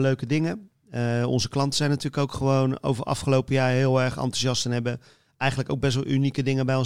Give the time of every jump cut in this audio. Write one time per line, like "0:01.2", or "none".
none